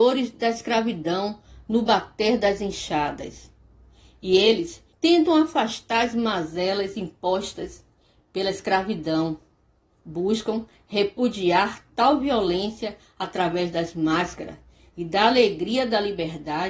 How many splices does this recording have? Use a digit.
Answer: 1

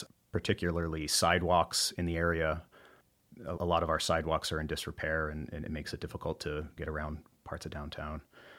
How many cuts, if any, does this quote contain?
2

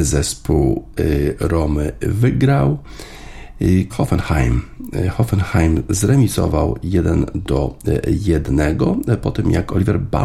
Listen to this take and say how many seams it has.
1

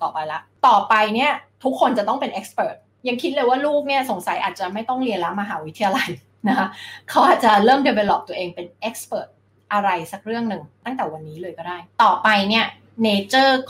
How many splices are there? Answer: 0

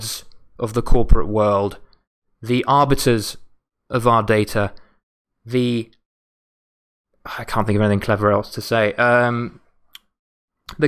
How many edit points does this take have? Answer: 0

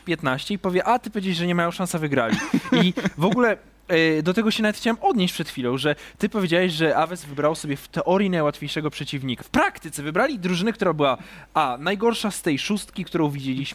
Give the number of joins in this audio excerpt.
1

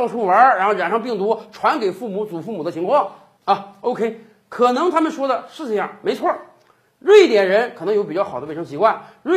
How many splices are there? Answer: 0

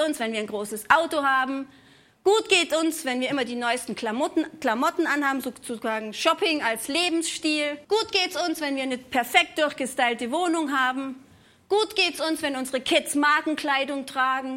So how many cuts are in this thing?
1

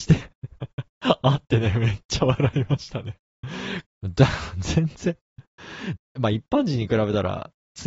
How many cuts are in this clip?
2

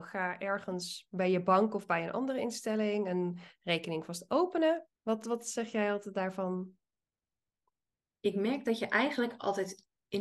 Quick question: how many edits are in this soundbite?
1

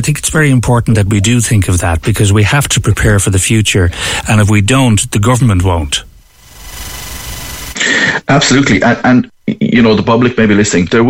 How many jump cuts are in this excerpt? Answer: 0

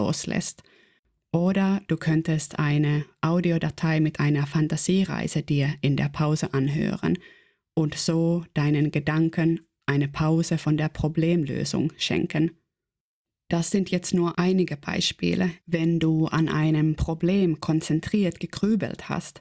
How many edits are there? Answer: 2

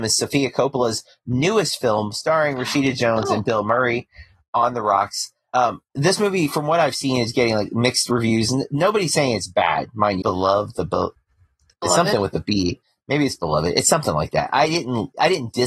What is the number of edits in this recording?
1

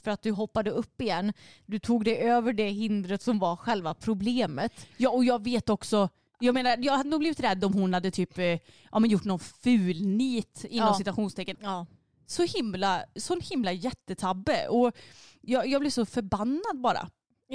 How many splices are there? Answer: 1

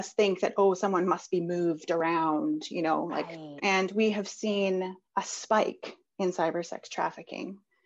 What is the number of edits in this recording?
2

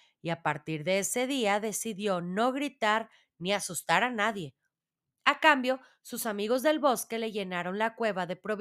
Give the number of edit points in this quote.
0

